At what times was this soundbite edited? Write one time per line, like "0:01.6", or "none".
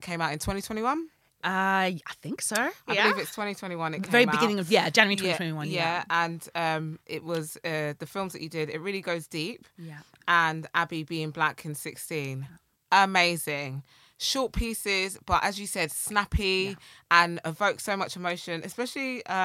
none